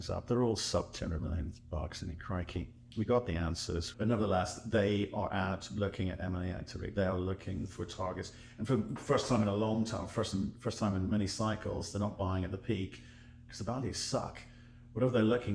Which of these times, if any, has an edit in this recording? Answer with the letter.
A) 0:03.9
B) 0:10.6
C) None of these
A